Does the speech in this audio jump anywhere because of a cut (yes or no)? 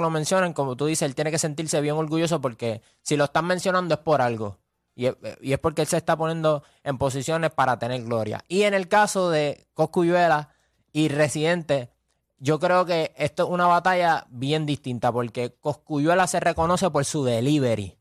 no